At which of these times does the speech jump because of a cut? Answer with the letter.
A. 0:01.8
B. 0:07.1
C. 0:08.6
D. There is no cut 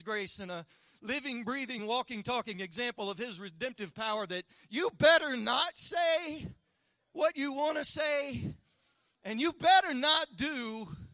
D